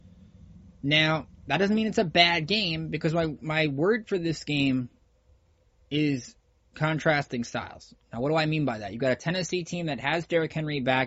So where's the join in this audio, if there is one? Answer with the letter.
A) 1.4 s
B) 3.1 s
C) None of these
C